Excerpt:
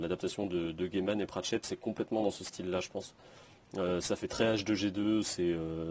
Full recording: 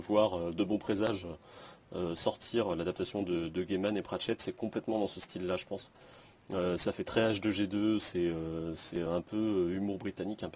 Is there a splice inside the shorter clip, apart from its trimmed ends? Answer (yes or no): no